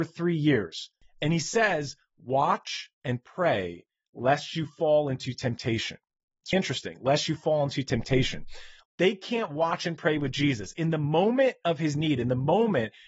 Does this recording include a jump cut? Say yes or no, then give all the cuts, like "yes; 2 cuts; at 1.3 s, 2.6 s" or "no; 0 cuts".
yes; 2 cuts; at 6.5 s, 8.8 s